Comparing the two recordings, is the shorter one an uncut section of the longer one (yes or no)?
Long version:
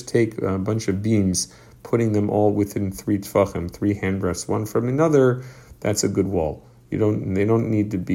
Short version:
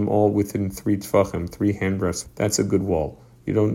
no